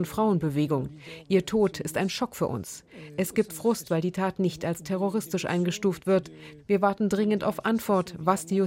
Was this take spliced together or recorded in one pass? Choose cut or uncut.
uncut